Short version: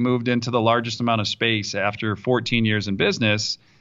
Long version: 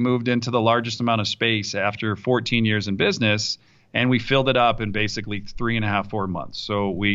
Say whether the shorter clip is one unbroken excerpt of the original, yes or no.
yes